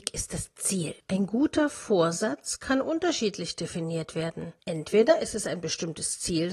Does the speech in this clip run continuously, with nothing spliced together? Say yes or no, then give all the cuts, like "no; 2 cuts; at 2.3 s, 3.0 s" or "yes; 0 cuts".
yes; 0 cuts